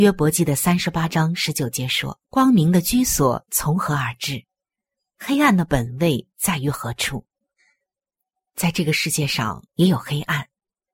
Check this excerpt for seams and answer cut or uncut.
cut